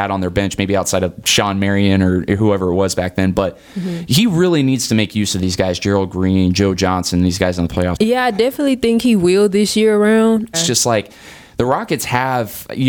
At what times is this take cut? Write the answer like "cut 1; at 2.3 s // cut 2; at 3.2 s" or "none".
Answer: cut 1; at 8.0 s // cut 2; at 10.5 s

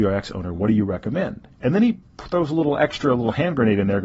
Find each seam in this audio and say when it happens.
none

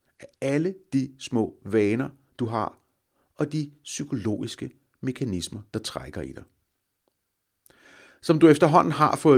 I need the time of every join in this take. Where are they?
cut 1; at 5.7 s

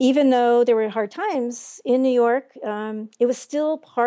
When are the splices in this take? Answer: none

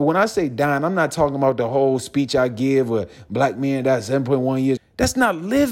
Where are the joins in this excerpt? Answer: cut 1; at 4.8 s

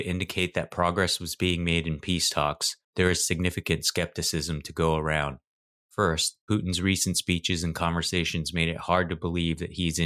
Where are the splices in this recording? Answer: cut 1; at 2.8 s

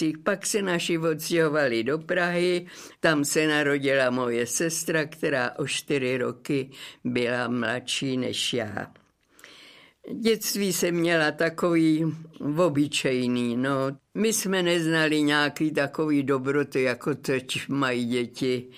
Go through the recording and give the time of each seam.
cut 1; at 3.0 s

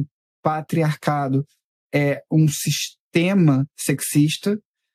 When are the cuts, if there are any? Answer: none

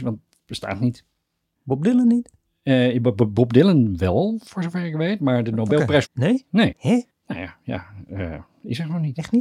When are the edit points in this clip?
cut 1; at 6.0 s

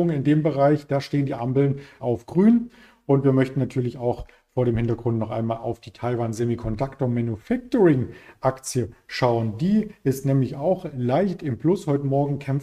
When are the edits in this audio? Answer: cut 1; at 2.0 s

